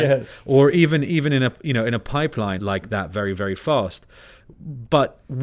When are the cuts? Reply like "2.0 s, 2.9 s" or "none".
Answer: 2.6 s